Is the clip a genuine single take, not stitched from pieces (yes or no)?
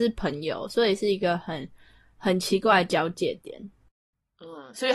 yes